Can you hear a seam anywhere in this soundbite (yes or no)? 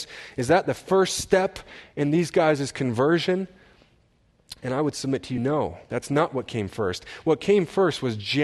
no